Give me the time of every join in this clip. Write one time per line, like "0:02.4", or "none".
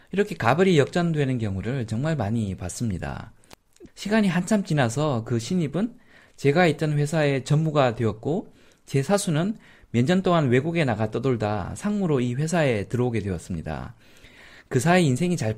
0:03.9